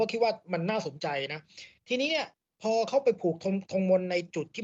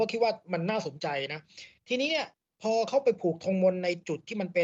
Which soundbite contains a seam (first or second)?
second